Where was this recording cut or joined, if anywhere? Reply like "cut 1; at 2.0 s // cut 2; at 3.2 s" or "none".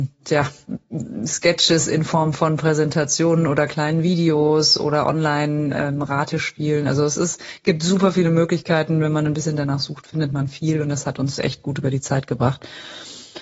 none